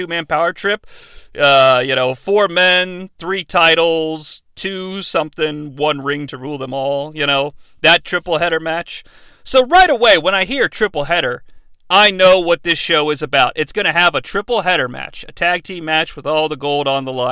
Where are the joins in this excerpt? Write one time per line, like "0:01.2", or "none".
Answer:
none